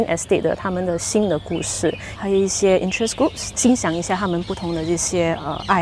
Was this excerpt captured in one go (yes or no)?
no